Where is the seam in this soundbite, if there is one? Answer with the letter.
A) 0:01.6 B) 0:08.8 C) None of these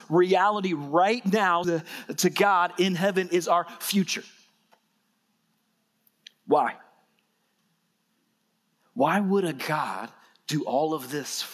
A